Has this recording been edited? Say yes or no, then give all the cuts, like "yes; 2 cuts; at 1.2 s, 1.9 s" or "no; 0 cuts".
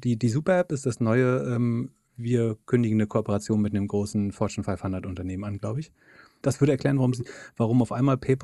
yes; 1 cut; at 6.4 s